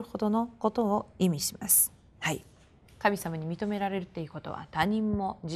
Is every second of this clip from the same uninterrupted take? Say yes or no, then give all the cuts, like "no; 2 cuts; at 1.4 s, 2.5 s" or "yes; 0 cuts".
yes; 0 cuts